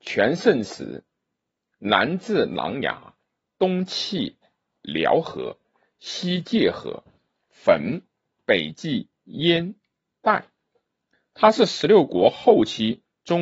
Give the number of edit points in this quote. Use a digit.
0